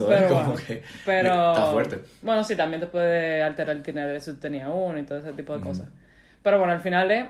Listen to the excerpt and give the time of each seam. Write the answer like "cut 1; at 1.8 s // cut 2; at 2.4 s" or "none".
none